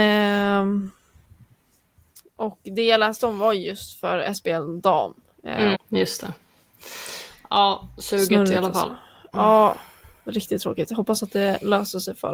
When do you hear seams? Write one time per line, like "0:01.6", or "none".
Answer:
0:05.7